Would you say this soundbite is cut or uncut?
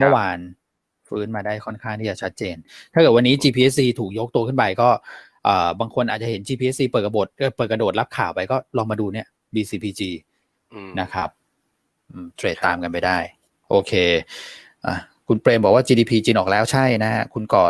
uncut